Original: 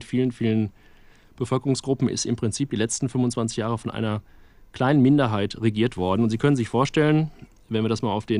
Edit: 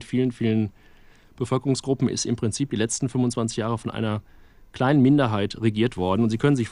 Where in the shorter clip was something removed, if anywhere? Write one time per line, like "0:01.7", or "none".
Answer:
none